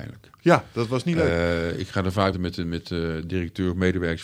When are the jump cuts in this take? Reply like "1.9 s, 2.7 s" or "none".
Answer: 2.3 s